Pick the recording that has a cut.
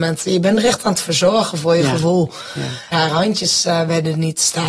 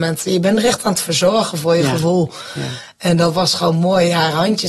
first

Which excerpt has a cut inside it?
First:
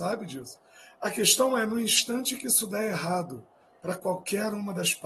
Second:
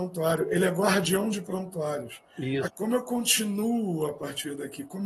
second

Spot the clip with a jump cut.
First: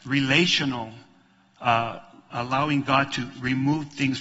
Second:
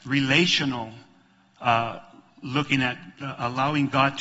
first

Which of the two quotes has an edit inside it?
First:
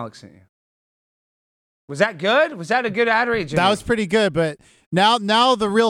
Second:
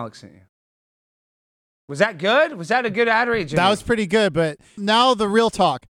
second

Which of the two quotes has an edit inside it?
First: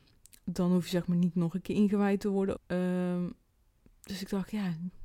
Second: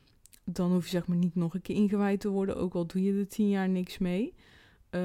first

